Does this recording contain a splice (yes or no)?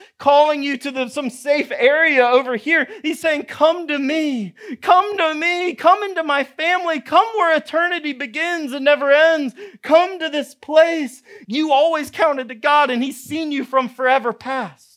yes